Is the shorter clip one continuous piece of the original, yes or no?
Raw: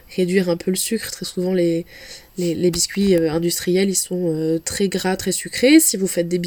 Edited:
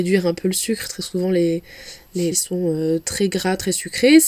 no